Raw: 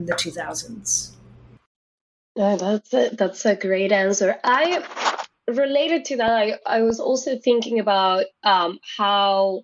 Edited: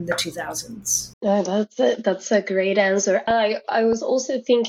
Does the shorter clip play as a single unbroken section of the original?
no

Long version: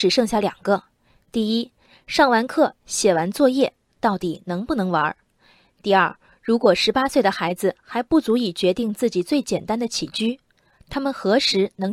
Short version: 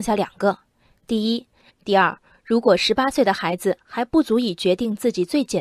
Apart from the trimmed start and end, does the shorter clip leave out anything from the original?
yes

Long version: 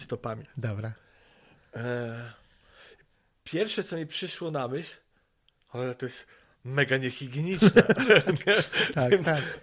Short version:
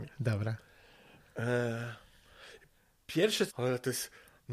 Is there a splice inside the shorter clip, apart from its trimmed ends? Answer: yes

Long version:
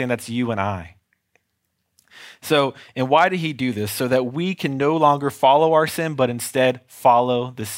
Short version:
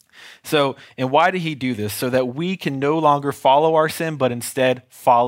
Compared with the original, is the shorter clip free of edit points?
yes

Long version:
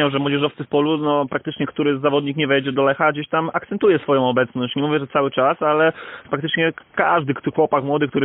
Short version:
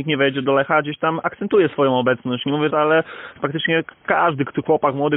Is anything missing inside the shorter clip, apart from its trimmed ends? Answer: yes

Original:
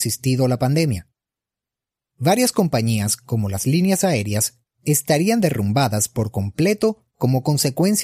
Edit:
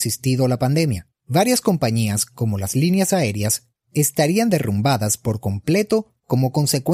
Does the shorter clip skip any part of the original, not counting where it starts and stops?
yes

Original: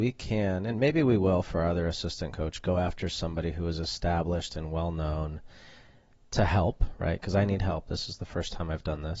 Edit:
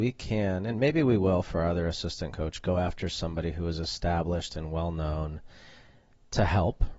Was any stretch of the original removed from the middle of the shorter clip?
no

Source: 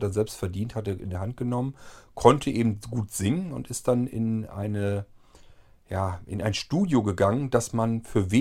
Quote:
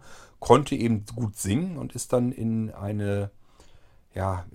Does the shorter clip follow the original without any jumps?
yes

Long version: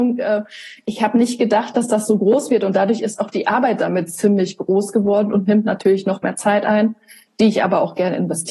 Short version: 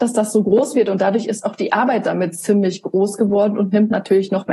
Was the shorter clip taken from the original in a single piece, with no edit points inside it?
yes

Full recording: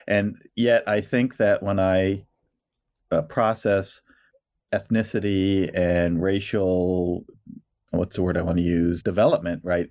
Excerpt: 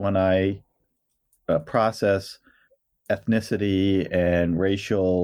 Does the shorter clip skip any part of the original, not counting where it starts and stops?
no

